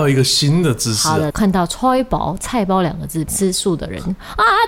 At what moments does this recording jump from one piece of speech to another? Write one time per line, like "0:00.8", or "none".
0:01.3
0:03.3